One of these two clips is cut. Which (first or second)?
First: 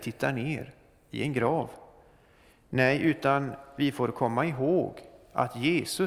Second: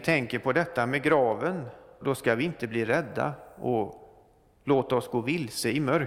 second